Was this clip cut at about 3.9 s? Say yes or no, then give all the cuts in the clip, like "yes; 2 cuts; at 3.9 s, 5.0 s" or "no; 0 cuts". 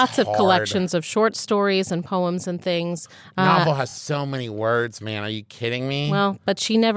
no; 0 cuts